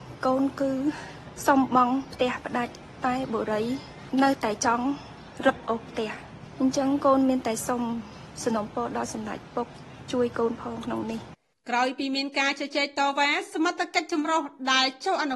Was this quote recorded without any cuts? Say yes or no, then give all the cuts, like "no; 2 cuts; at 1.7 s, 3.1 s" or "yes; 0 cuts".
yes; 0 cuts